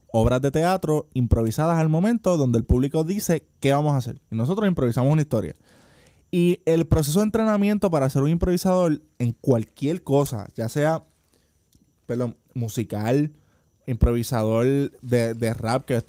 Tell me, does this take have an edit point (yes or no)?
no